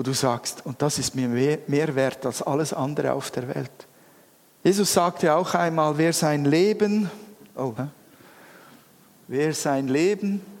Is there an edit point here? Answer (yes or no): yes